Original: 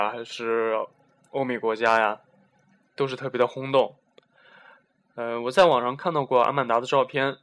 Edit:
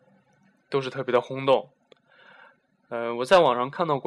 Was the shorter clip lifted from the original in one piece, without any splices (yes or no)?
yes